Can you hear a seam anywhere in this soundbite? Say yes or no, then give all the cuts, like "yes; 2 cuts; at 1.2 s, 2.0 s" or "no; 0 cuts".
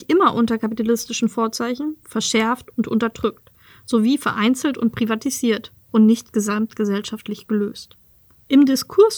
yes; 1 cut; at 2.0 s